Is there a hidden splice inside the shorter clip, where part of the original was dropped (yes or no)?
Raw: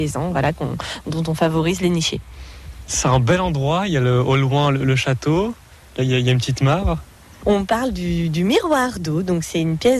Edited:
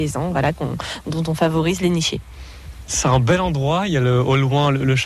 no